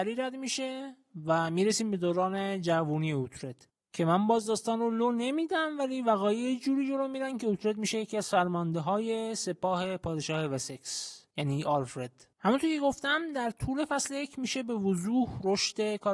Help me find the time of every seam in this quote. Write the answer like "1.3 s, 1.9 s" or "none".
12.3 s